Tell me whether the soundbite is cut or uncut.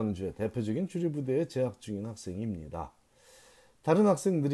uncut